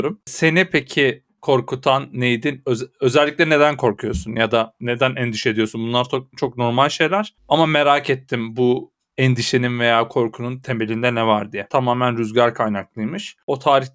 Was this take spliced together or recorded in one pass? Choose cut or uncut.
cut